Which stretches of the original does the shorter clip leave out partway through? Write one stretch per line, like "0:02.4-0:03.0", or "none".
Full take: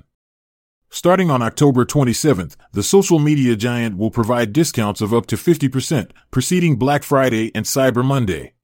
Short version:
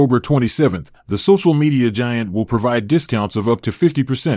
none